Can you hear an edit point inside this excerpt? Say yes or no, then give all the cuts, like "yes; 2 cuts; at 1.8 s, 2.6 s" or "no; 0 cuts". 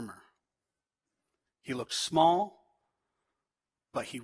no; 0 cuts